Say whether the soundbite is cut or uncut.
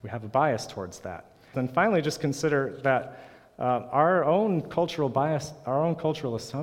cut